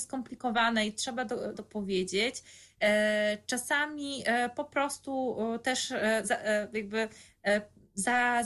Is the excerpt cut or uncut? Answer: cut